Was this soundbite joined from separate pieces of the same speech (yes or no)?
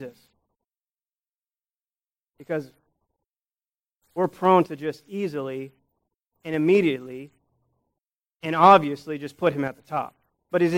no